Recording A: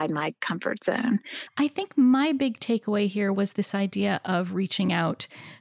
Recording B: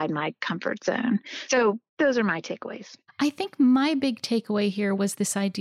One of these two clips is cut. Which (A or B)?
A